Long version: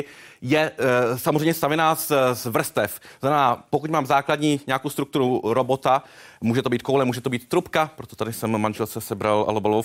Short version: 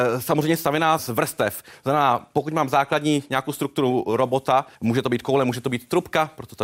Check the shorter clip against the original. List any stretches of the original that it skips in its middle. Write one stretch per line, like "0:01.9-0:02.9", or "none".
0:02.0-0:02.4
0:06.1-0:06.4